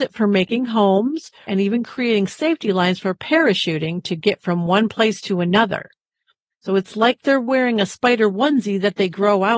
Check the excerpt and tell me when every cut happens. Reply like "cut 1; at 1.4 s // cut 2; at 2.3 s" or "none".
cut 1; at 1.5 s // cut 2; at 6.5 s